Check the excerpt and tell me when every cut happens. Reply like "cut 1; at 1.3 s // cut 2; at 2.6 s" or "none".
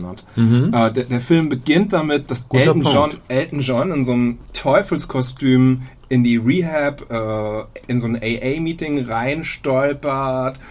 none